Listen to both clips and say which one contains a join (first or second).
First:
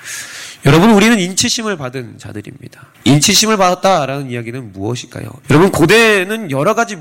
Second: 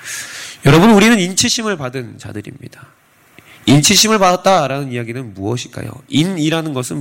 first